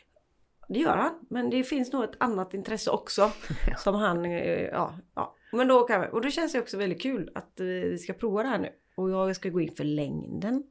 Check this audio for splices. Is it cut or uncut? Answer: uncut